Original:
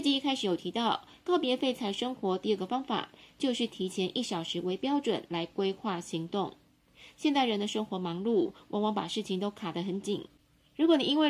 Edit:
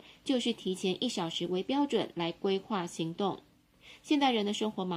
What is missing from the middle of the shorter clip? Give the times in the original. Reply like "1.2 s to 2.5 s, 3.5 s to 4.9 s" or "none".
none